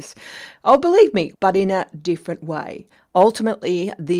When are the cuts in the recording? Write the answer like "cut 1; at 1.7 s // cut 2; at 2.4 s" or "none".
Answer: cut 1; at 1.3 s